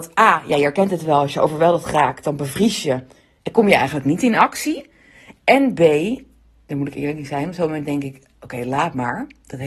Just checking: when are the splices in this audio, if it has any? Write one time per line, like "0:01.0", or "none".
0:05.4